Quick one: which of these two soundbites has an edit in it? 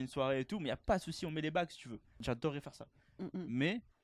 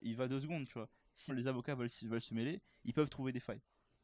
second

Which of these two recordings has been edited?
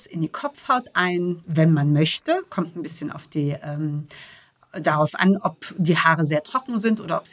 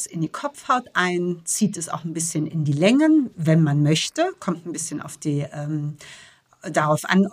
first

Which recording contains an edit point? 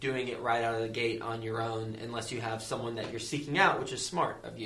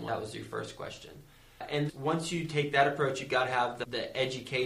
second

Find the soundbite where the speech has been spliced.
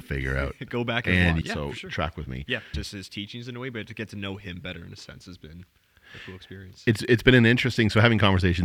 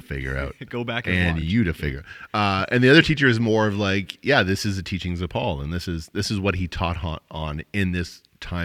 first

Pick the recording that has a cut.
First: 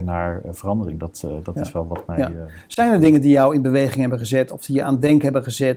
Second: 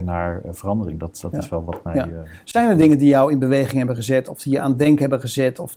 second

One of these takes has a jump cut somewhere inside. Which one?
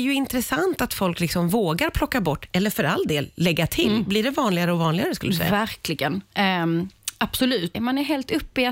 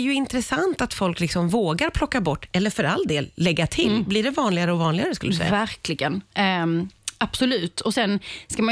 first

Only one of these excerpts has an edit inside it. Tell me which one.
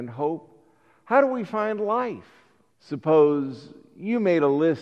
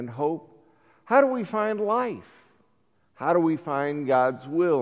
first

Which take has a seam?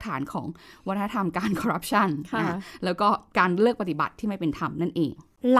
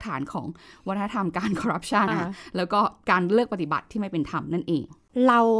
second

